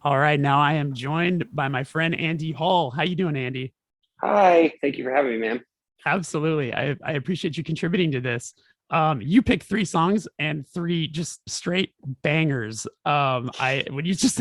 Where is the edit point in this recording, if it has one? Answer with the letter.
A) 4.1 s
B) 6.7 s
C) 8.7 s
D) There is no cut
D